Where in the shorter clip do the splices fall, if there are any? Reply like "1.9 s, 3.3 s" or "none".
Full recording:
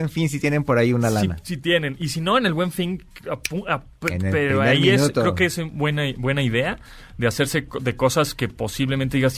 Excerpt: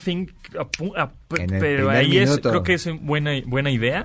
none

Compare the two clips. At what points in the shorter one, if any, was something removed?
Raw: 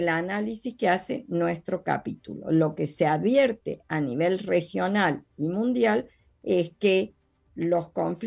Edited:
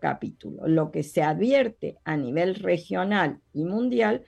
none

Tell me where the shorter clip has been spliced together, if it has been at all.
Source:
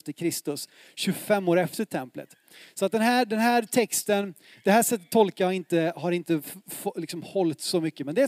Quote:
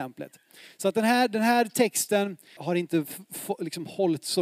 2.6 s

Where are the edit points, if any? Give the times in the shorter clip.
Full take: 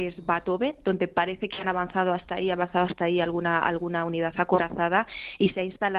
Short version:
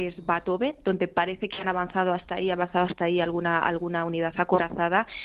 none

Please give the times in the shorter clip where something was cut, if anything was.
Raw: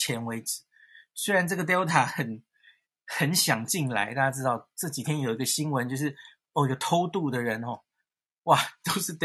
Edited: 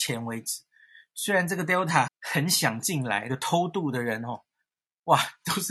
2.1 s, 3.3 s

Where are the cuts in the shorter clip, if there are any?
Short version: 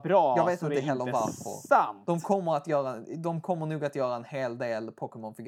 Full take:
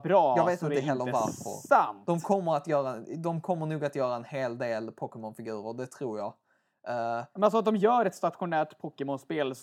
none

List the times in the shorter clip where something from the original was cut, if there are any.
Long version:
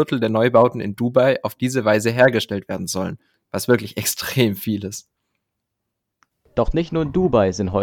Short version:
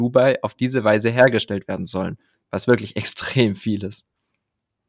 none

